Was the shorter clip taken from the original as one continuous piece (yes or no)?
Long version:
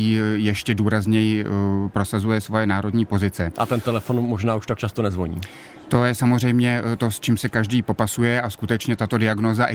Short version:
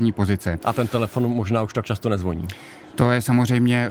yes